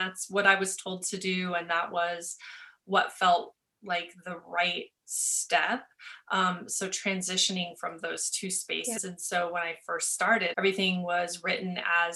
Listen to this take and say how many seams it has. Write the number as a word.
two